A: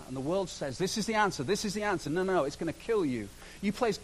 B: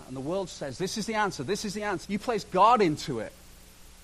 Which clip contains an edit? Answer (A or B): B